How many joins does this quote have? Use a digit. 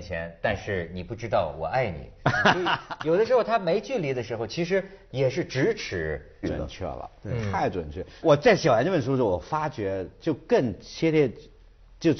2